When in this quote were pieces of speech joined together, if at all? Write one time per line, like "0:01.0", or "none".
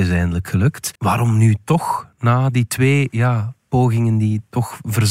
0:01.0